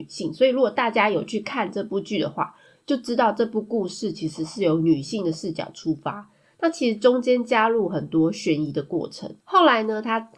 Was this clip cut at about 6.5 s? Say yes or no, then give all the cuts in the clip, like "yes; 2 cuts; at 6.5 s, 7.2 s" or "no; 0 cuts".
no; 1 cut; at 9.4 s